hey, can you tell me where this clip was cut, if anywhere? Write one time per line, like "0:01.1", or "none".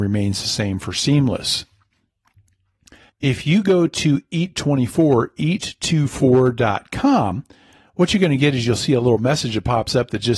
0:03.1